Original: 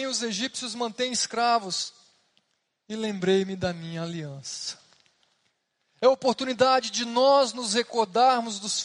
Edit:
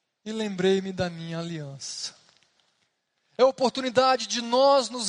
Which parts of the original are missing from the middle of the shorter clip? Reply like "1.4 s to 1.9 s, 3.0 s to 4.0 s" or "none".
none